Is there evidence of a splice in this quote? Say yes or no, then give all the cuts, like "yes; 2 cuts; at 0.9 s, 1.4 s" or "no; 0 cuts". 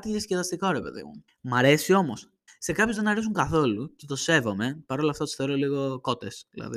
yes; 2 cuts; at 1.3 s, 2.5 s